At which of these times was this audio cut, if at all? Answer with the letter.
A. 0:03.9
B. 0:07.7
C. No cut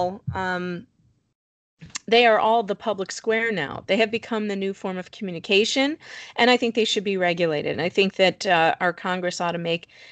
B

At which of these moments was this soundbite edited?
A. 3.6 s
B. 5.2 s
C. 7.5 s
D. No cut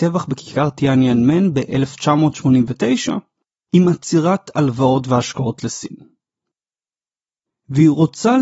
C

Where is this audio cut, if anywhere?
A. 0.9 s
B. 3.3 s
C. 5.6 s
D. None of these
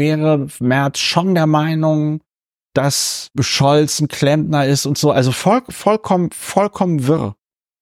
B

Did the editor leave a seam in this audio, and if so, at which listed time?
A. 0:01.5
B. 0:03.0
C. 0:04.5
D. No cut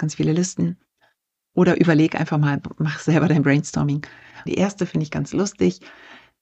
C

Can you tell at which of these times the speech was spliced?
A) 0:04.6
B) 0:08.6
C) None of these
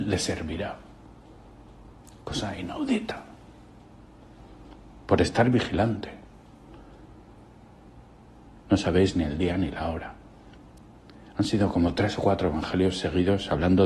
B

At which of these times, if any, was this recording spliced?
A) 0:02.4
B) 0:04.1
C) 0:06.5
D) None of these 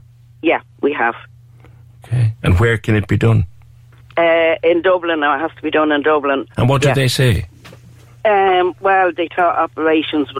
C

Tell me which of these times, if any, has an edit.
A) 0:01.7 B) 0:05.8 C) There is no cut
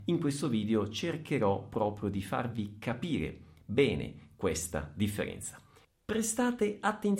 B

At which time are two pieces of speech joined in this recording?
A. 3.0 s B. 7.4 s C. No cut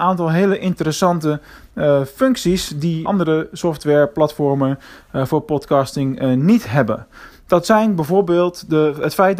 A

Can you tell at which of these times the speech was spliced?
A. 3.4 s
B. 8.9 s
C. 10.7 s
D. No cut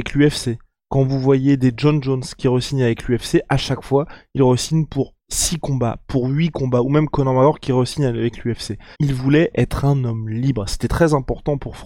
B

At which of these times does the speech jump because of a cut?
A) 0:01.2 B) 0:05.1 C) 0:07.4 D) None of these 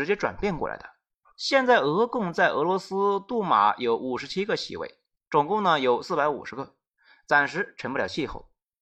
A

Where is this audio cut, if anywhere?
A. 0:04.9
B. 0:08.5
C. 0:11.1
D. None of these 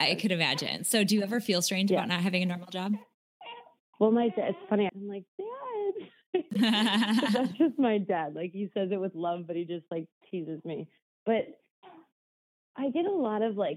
A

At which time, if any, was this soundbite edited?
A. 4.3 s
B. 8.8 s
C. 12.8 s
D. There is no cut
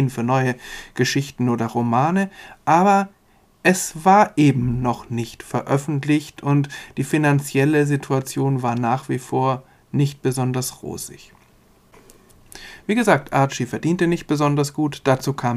D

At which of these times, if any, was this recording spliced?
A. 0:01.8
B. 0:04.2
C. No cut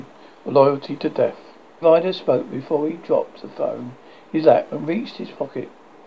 A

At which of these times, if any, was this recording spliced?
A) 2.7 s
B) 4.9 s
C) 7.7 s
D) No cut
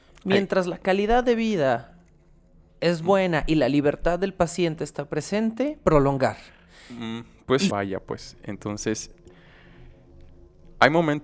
C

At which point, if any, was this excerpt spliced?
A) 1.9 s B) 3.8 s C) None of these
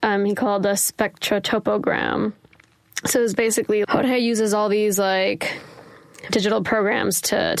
B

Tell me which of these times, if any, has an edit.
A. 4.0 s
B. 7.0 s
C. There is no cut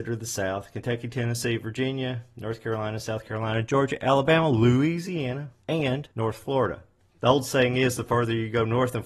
B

